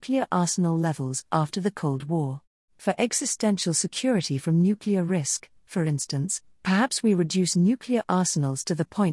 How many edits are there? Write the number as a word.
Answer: one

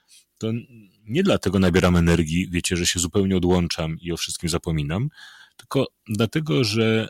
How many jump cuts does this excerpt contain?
zero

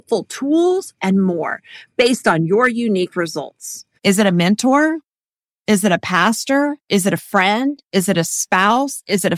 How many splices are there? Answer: two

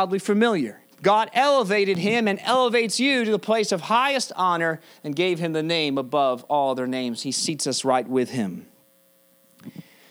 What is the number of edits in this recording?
one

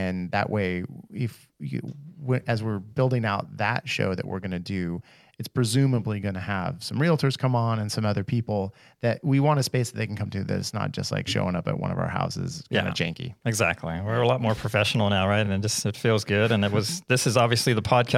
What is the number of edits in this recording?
zero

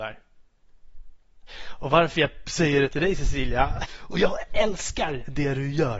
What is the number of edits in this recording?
two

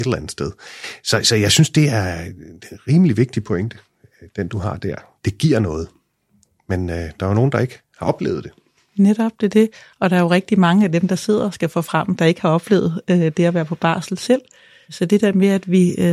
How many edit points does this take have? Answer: zero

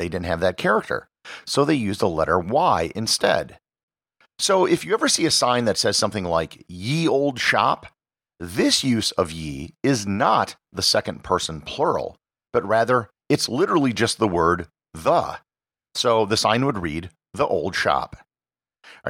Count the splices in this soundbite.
zero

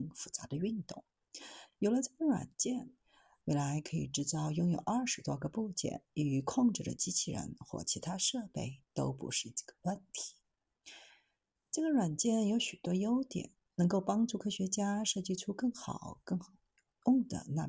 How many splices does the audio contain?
zero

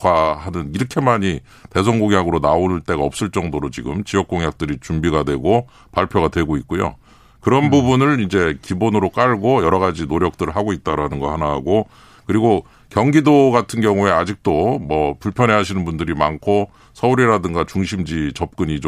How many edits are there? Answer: zero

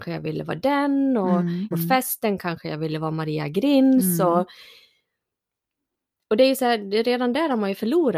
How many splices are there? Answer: one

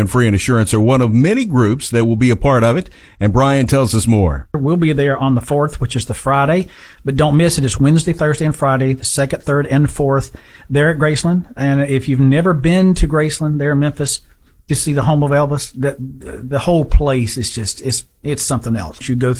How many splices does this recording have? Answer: zero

